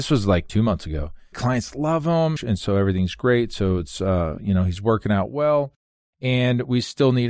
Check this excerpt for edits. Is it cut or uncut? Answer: cut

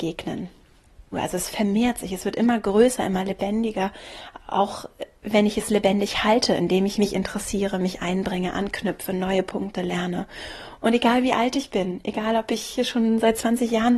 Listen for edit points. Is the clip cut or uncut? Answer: cut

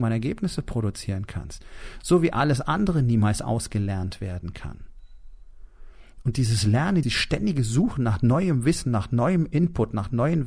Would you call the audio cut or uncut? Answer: cut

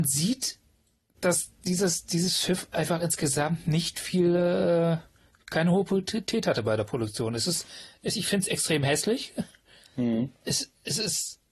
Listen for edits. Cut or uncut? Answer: uncut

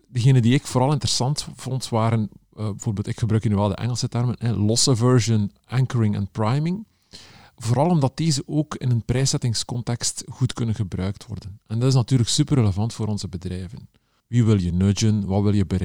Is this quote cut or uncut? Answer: cut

